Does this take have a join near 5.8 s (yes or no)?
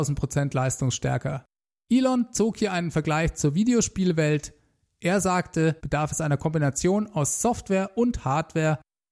yes